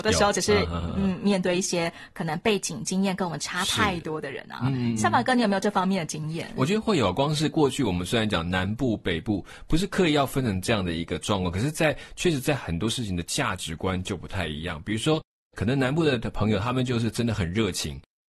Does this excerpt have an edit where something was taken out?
no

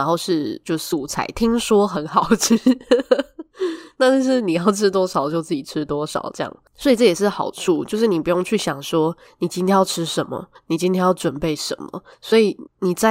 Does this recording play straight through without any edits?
yes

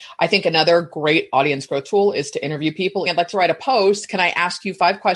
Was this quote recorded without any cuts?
no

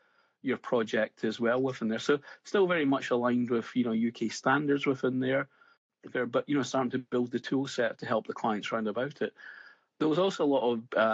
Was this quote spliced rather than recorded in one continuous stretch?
no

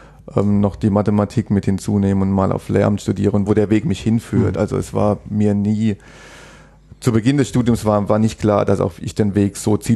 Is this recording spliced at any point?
yes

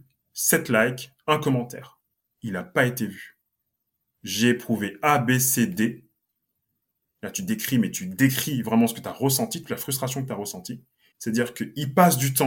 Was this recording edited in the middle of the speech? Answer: yes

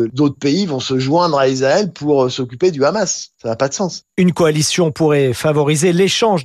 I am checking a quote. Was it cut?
no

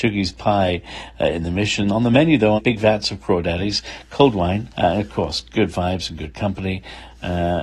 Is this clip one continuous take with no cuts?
no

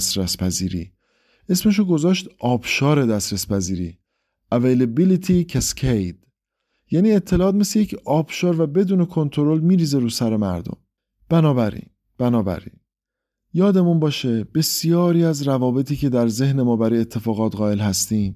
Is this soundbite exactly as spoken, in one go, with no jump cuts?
yes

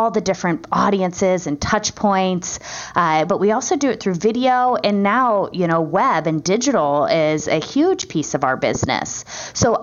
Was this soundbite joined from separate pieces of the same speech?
yes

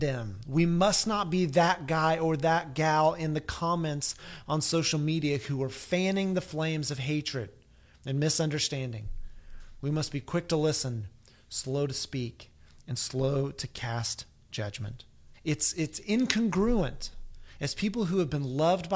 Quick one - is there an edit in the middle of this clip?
yes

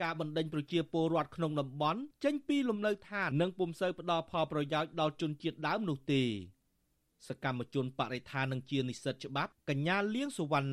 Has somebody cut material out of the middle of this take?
yes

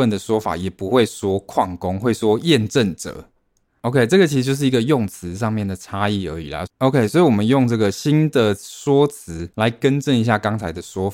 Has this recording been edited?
yes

